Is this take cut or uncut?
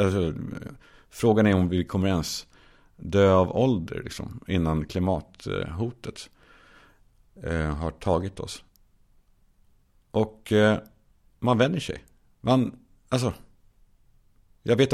uncut